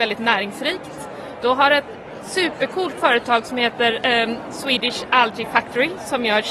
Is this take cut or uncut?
uncut